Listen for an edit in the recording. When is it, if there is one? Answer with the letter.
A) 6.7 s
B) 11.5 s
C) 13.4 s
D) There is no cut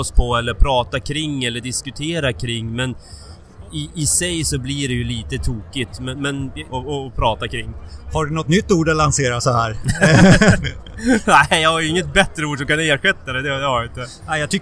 A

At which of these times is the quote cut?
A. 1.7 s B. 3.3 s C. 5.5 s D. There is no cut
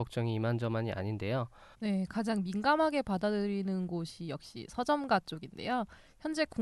A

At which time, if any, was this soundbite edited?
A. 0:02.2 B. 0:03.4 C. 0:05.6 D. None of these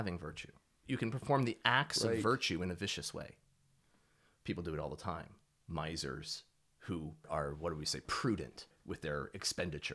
C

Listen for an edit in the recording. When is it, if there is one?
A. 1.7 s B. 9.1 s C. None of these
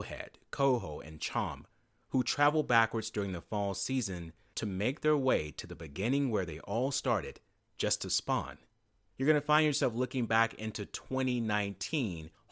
B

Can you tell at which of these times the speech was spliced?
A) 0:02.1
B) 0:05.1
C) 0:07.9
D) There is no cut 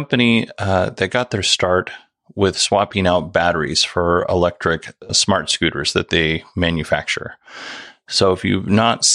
B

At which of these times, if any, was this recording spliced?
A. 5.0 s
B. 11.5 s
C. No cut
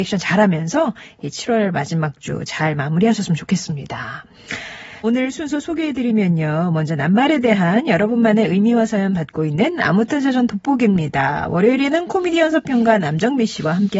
A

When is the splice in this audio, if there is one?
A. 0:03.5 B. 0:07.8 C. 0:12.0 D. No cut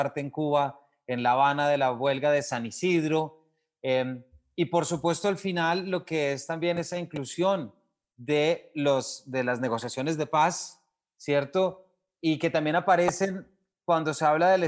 D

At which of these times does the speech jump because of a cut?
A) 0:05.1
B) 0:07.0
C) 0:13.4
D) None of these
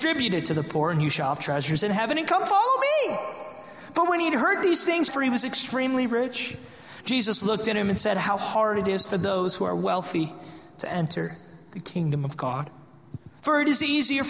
A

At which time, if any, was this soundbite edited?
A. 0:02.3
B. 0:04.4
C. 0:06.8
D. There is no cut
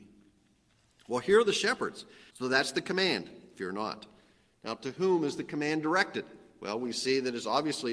A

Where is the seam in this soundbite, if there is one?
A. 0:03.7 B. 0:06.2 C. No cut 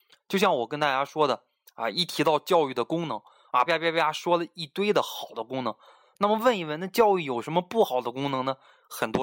A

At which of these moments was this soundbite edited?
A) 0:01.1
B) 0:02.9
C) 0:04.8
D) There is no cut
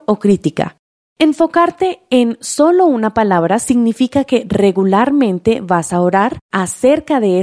A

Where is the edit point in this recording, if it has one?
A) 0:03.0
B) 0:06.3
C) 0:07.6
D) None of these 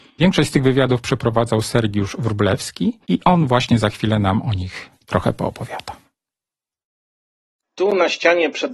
A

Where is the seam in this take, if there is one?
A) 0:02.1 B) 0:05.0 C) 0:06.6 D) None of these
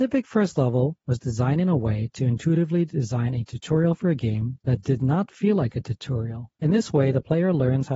C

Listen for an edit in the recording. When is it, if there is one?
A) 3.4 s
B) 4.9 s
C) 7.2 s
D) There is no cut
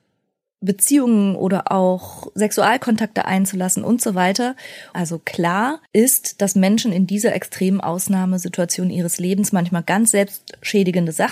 B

